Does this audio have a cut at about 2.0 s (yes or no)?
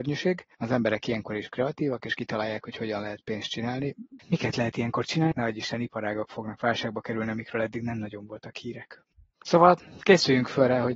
no